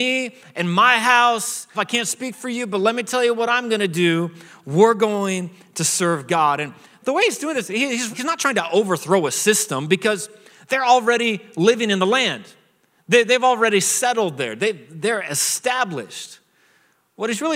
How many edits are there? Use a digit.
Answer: 2